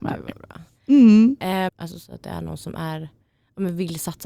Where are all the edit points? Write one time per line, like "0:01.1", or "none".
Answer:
0:01.7